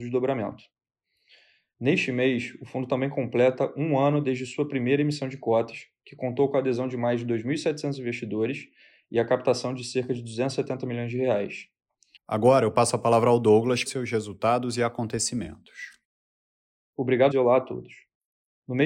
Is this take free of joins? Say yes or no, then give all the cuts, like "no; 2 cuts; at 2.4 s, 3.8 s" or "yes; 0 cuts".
no; 3 cuts; at 12.2 s, 13.9 s, 17.3 s